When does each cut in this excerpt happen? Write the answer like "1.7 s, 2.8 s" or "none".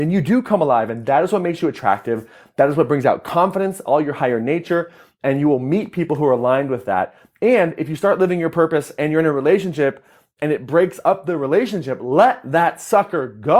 none